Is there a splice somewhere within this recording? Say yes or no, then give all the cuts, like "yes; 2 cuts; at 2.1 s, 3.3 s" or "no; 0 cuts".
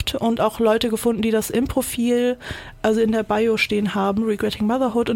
no; 0 cuts